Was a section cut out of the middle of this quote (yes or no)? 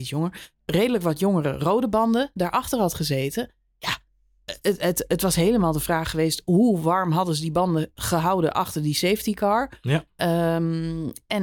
no